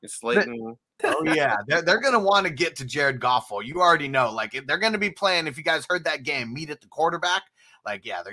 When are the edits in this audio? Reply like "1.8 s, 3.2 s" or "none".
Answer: 1.0 s